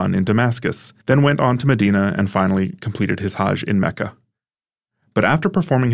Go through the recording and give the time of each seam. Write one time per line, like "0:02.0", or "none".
0:01.0